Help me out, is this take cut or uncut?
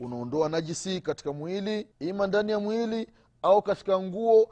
cut